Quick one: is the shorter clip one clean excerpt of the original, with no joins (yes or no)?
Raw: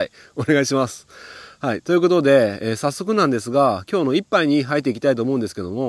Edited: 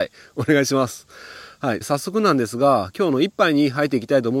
no